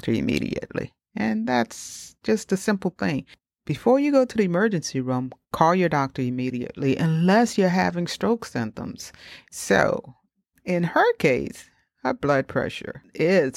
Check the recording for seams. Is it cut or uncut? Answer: cut